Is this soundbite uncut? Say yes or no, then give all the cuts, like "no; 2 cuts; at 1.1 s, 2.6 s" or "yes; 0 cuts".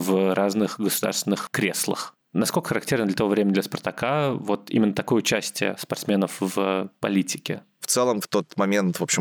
yes; 0 cuts